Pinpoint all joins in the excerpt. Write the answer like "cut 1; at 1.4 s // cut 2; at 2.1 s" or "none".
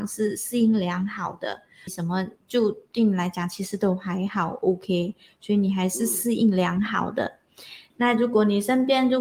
cut 1; at 1.9 s // cut 2; at 7.9 s